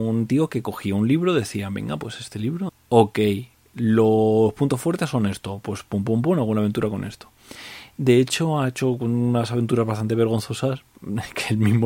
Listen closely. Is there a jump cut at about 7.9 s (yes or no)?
no